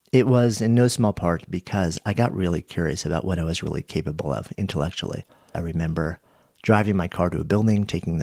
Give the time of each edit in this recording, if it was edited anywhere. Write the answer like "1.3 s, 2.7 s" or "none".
5.5 s